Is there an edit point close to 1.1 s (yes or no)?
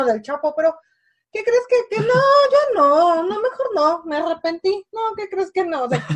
no